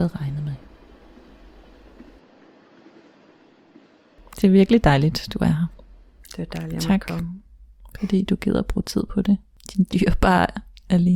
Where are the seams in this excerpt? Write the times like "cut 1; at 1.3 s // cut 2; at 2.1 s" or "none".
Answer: none